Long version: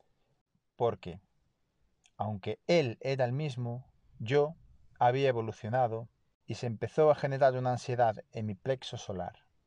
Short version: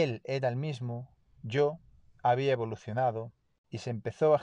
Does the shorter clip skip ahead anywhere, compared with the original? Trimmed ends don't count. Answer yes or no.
no